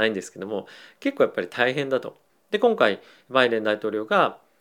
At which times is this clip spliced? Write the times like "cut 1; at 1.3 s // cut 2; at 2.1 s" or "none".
cut 1; at 2.3 s